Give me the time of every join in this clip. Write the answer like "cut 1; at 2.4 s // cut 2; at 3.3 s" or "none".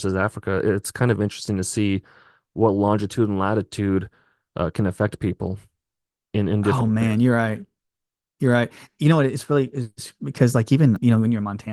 none